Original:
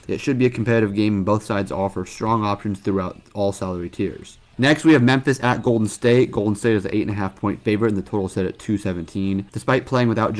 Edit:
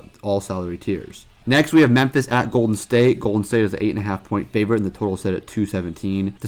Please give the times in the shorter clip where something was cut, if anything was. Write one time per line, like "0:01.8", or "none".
none